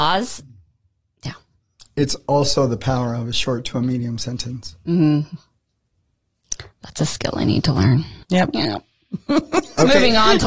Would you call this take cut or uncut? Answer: uncut